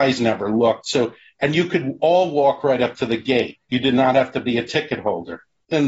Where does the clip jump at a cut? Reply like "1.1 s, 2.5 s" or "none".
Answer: none